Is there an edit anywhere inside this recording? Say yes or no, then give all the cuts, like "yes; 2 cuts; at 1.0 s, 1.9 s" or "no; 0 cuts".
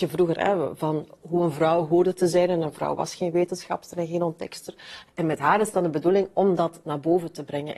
yes; 1 cut; at 5.1 s